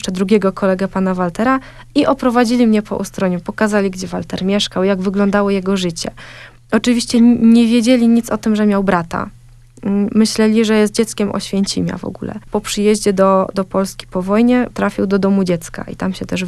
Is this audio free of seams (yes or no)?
no